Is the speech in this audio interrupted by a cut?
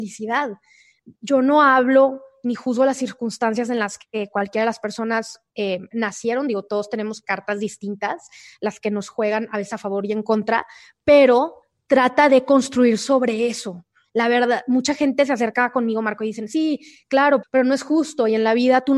yes; 1 cut; at 17.4 s

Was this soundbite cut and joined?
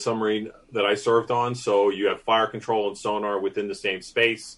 no; 0 cuts

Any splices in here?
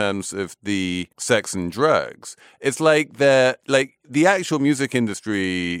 yes; 1 cut; at 1.1 s

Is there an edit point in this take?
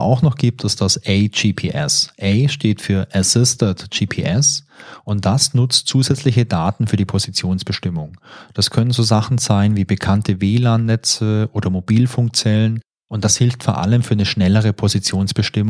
no; 0 cuts

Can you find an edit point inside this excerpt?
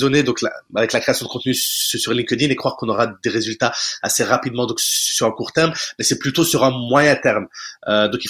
no; 0 cuts

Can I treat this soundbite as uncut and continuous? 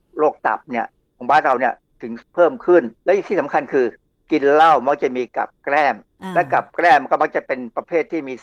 no; 1 cut; at 3.0 s

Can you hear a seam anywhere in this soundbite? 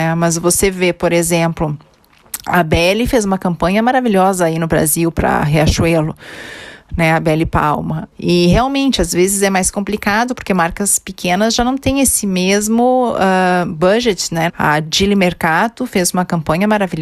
yes; 2 cuts; at 8.1 s, 14.5 s

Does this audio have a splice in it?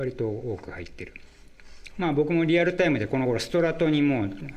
yes; 1 cut; at 1.9 s

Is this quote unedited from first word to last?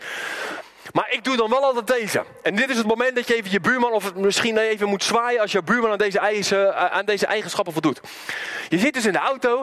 yes; 0 cuts

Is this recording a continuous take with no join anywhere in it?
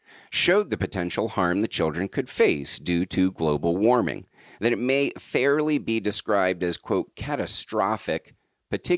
yes; 0 cuts

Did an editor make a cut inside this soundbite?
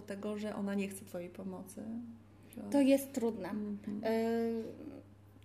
no; 0 cuts

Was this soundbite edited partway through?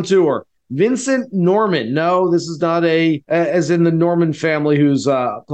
yes; 1 cut; at 3.2 s

